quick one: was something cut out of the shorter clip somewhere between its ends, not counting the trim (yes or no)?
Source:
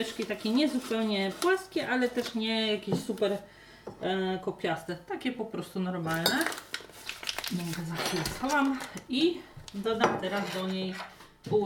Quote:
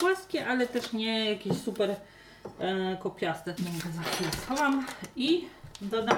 yes